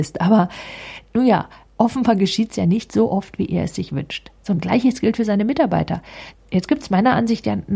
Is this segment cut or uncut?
cut